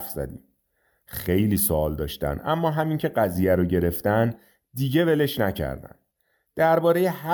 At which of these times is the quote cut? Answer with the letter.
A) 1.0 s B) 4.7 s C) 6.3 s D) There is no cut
A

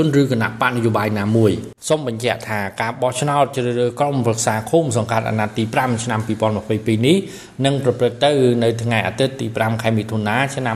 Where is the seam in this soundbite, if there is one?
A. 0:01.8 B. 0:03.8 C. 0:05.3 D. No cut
A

